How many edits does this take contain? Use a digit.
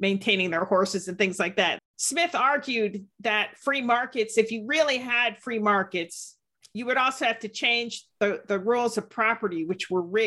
2